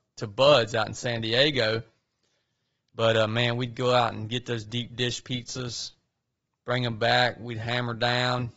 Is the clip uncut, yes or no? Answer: yes